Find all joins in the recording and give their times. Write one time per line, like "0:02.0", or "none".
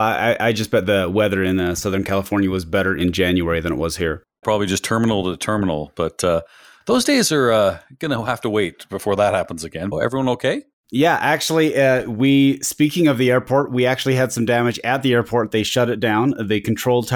0:04.4
0:09.9